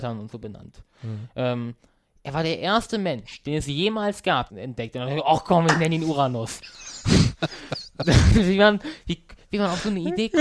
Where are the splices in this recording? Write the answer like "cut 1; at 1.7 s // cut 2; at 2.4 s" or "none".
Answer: cut 1; at 4.5 s